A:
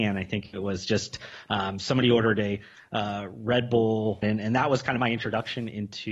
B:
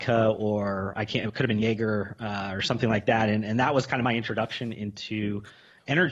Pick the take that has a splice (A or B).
A